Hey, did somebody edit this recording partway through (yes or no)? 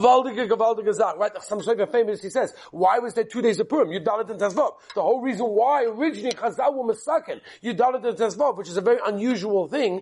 no